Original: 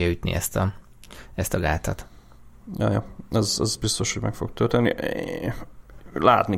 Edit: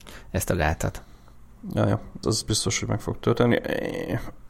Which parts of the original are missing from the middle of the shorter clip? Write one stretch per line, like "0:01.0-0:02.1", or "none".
0:03.3-0:03.6